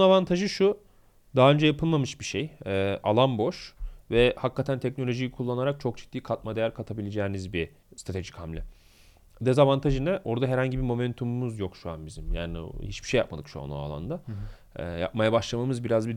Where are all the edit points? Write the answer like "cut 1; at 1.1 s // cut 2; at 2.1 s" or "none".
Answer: none

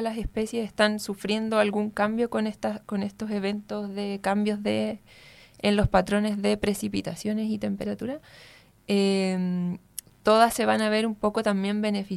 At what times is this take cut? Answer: none

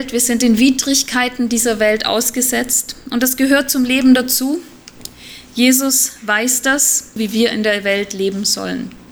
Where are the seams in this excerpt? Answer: cut 1; at 7.2 s

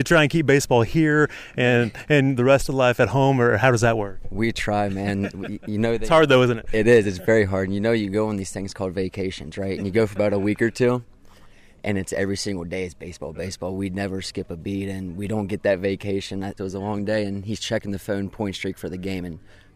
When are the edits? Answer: cut 1; at 13.3 s // cut 2; at 16.6 s

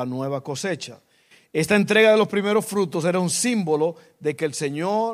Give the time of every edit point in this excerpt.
none

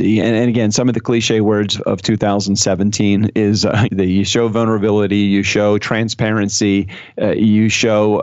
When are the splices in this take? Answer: cut 1; at 1.7 s // cut 2; at 3.9 s

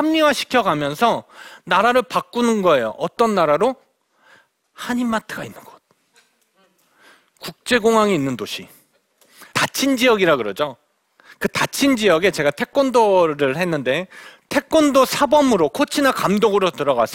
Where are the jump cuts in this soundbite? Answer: cut 1; at 9.5 s

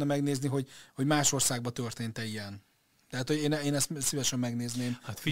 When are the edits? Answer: none

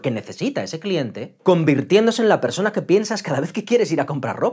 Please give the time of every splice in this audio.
none

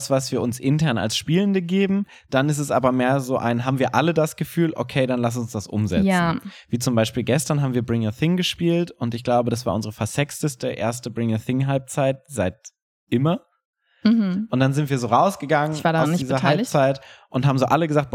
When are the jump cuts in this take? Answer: none

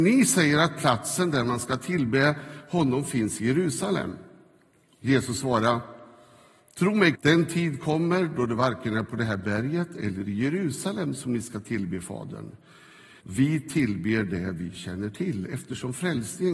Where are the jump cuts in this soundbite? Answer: cut 1; at 7.1 s // cut 2; at 13.2 s

